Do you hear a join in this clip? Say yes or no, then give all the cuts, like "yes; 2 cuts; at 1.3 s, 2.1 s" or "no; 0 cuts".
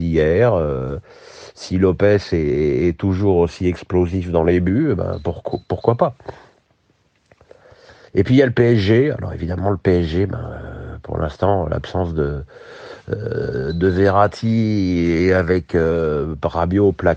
no; 0 cuts